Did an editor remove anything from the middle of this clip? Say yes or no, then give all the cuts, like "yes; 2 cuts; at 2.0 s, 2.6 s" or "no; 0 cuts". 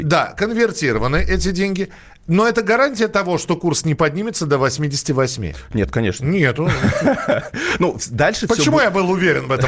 no; 0 cuts